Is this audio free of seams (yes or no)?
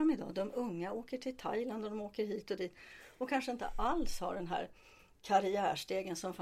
yes